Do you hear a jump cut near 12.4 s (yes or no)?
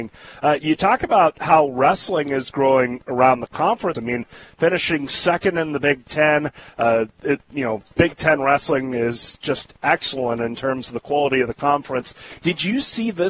no